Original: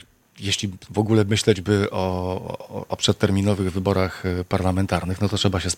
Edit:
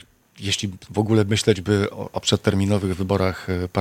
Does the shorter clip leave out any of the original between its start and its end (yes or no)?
yes